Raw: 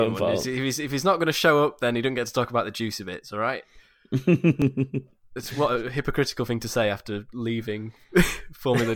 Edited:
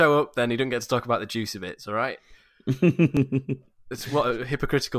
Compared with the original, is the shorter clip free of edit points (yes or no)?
yes